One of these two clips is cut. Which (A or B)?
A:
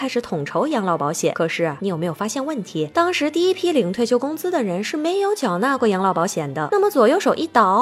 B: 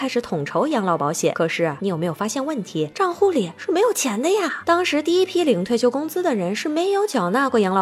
A